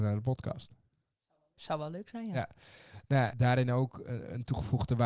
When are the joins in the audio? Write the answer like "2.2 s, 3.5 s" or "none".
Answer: 3.3 s